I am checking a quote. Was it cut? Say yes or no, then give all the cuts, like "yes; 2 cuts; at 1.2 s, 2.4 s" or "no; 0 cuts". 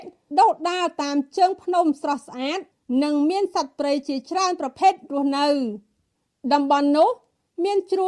no; 0 cuts